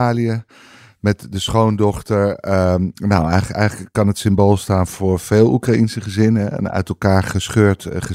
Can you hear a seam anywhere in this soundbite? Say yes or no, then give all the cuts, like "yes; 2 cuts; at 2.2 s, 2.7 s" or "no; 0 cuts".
no; 0 cuts